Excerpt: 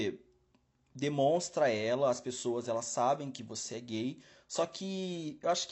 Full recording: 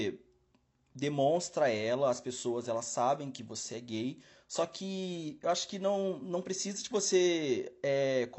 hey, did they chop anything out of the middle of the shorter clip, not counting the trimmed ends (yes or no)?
no